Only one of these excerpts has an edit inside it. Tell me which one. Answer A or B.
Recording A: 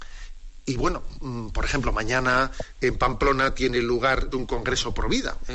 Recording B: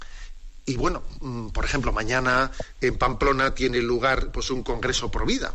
A